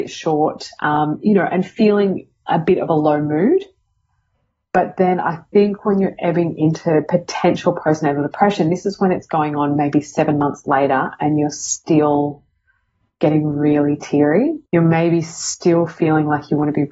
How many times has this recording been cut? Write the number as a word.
one